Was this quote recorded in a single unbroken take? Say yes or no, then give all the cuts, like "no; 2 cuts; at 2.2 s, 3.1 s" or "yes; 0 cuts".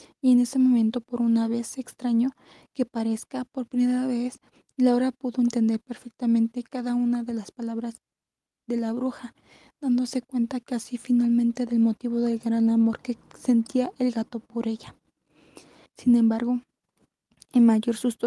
no; 1 cut; at 15.9 s